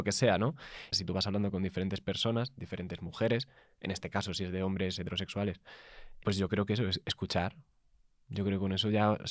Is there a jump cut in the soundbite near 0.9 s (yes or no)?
yes